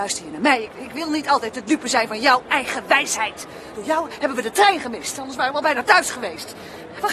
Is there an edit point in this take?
no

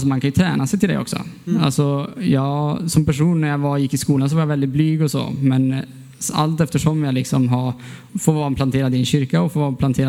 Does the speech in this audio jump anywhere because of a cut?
yes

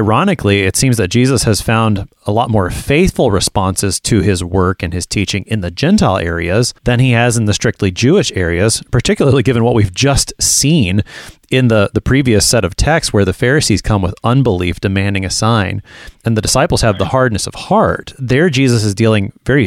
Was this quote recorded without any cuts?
no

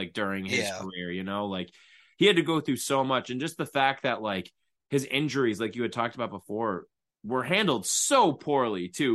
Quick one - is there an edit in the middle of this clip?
no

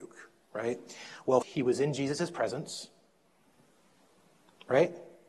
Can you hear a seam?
yes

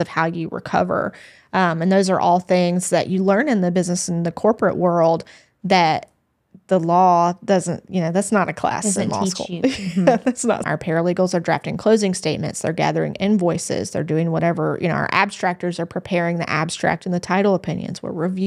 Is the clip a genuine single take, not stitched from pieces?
no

